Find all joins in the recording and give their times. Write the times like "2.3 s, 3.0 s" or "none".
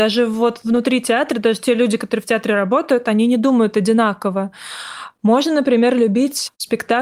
none